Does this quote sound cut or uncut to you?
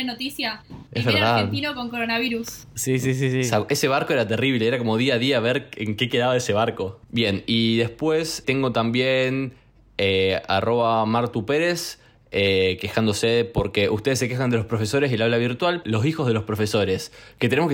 cut